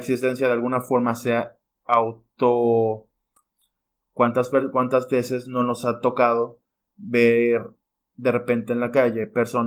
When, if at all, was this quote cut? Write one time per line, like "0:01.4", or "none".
0:04.0